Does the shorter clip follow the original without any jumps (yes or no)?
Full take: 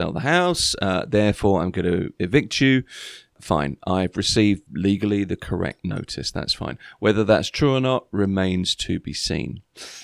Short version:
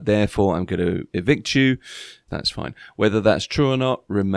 no